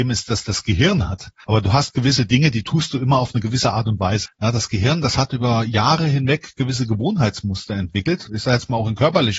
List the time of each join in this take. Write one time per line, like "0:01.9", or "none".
0:01.4
0:04.3
0:08.3